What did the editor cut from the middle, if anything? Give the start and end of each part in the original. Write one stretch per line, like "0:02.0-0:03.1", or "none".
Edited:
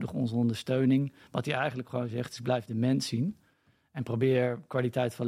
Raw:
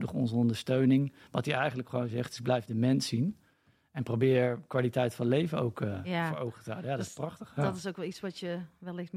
none